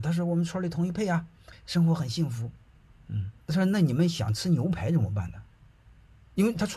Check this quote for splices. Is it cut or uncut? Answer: cut